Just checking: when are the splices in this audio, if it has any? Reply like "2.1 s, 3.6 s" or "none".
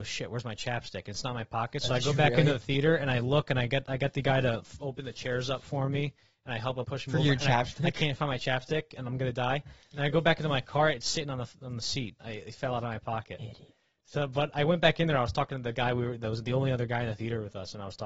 6.8 s

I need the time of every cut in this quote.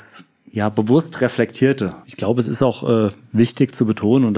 2.0 s

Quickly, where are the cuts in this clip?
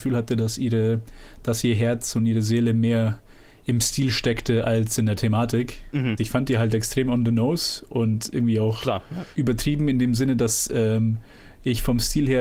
6.2 s

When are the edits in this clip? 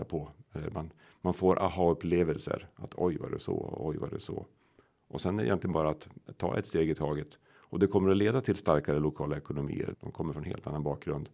9.9 s

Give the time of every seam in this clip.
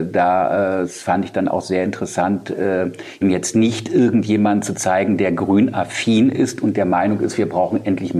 3.2 s

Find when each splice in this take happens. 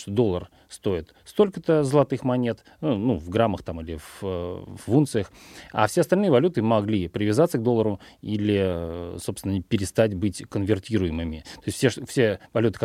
none

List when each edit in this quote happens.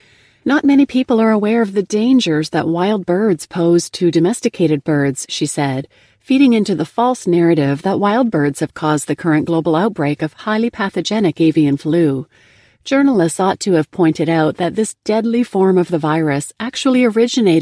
none

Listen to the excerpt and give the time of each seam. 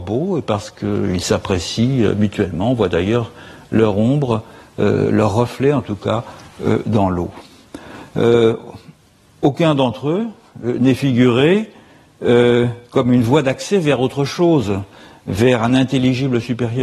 none

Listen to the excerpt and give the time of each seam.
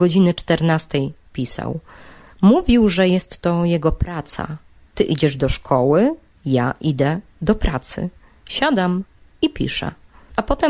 none

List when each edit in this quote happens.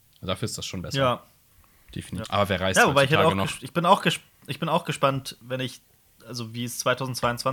2.2 s

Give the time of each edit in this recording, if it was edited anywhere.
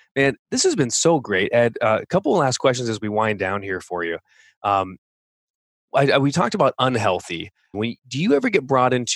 7.7 s

